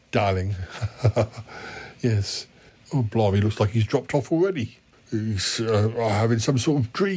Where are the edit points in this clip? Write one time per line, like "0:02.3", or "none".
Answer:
0:02.8
0:04.9

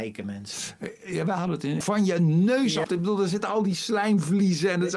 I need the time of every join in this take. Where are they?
0:01.8
0:02.8

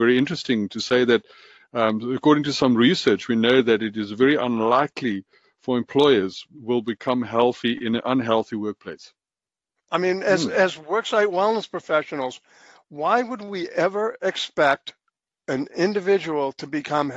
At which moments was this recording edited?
0:09.8

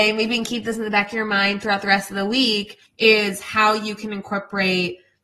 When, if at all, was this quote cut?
0:02.9

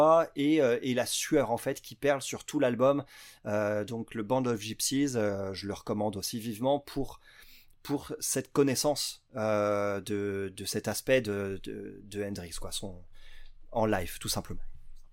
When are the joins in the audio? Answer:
none

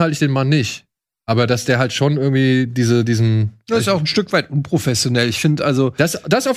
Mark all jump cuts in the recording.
none

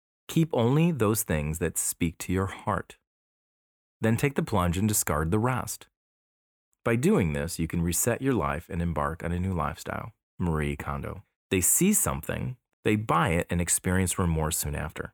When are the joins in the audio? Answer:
0:11.3
0:12.7

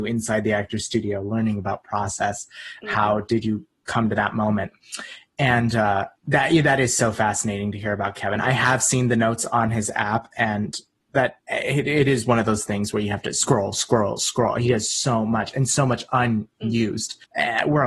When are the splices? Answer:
none

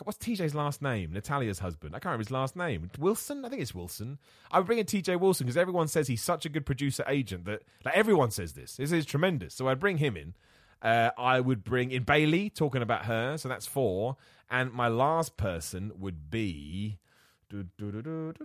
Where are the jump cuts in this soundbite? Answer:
none

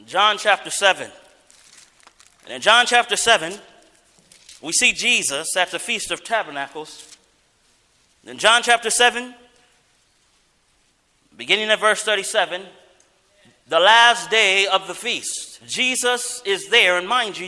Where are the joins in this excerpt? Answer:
0:15.6

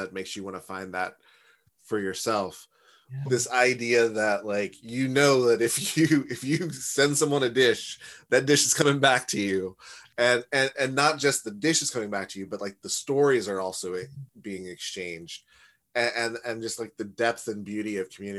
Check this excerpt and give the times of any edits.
0:03.3
0:10.7

